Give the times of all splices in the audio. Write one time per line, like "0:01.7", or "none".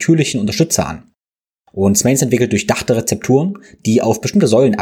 0:01.6